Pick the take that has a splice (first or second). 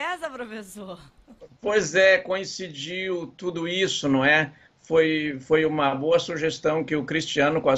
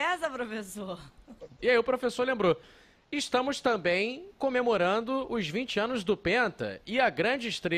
second